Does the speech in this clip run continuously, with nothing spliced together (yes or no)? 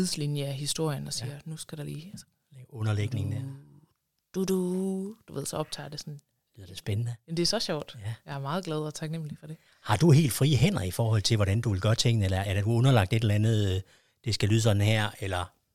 yes